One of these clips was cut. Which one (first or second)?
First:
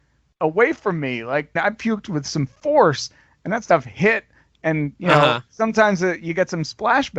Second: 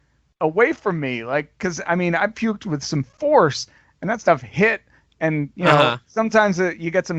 first